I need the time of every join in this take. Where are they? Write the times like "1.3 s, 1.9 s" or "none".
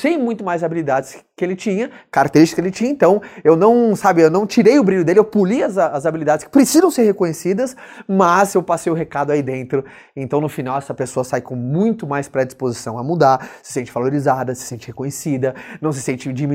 none